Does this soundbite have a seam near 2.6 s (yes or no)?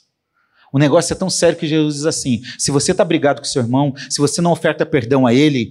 no